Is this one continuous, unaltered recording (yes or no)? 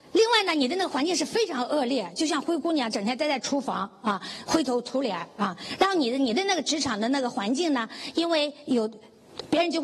yes